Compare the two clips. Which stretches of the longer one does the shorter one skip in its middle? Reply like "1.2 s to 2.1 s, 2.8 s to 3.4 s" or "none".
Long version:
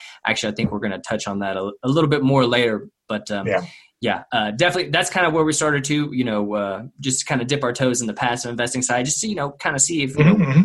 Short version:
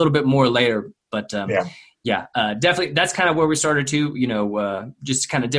none